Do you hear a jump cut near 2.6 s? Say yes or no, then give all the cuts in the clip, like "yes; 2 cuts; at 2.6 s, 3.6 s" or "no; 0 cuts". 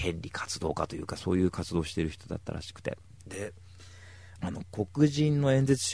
no; 1 cut; at 4.4 s